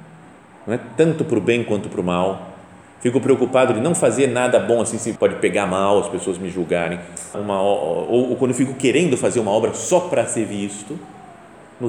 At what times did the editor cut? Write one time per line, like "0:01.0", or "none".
0:05.2
0:07.3